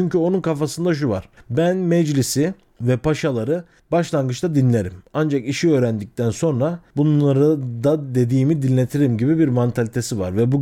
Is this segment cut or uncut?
uncut